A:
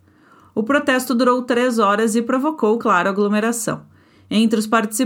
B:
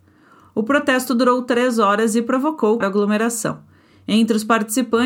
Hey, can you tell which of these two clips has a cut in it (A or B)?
B